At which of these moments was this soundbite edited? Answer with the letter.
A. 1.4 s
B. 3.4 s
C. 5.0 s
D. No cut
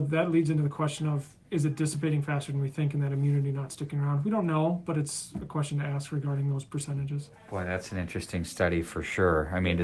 A